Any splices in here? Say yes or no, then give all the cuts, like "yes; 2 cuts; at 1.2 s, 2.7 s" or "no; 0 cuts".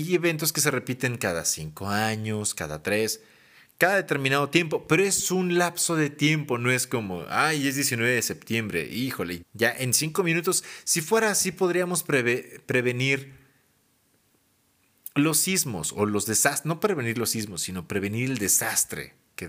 yes; 1 cut; at 9.4 s